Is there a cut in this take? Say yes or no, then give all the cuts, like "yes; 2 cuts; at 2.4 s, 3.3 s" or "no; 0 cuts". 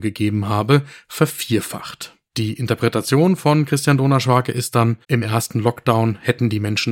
yes; 2 cuts; at 2.3 s, 5.0 s